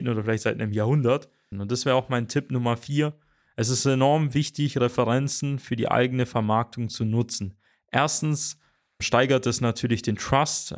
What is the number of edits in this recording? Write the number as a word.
one